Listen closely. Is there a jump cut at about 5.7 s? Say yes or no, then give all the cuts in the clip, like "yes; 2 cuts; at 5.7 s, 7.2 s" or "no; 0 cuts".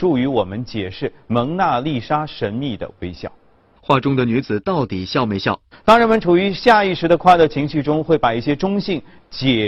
yes; 2 cuts; at 3.8 s, 5.7 s